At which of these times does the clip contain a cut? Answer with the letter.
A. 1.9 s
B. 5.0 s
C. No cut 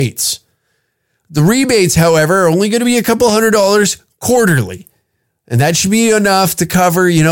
C